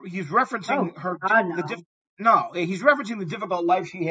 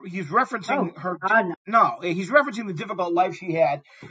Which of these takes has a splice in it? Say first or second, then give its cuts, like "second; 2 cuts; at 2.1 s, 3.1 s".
second; 1 cut; at 1.5 s